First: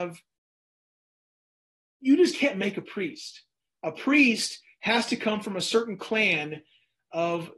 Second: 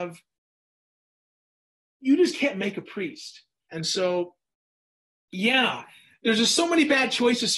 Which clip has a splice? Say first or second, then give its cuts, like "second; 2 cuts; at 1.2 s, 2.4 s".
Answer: second; 1 cut; at 3.7 s